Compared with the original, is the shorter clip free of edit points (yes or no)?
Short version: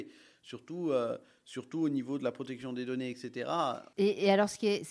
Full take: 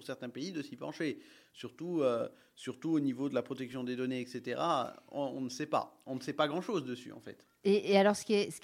no